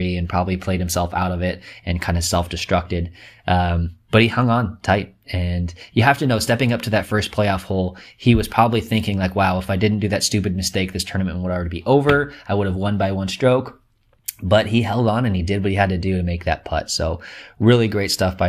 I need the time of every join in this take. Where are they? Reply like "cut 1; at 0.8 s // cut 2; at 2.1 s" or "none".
none